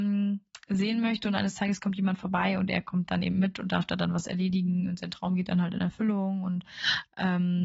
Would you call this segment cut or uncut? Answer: uncut